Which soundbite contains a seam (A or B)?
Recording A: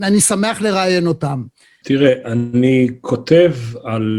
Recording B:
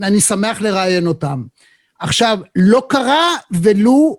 A